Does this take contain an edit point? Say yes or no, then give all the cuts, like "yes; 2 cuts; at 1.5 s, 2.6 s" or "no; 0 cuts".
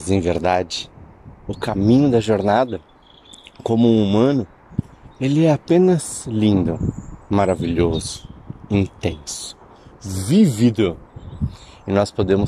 no; 0 cuts